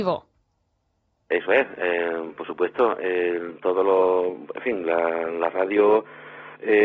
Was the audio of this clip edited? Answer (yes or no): no